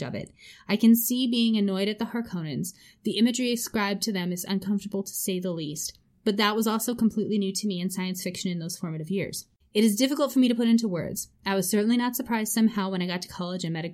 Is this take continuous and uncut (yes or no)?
no